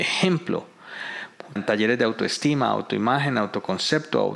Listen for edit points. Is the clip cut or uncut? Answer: cut